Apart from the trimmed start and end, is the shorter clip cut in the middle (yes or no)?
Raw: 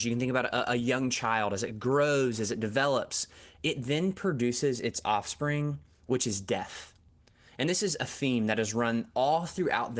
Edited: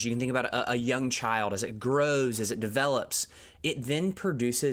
no